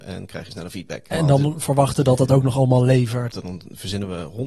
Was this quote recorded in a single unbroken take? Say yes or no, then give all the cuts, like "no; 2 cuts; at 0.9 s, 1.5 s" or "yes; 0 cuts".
no; 2 cuts; at 1.1 s, 3.3 s